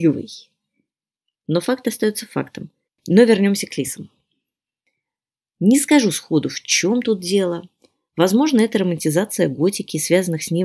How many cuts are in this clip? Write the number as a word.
two